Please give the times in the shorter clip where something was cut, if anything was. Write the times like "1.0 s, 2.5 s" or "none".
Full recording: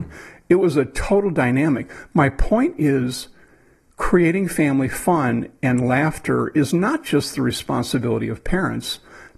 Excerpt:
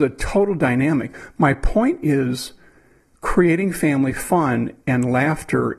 none